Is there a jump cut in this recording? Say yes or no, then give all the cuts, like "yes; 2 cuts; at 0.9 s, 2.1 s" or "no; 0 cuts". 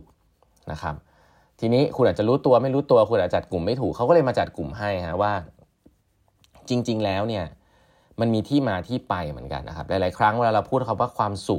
yes; 1 cut; at 9.6 s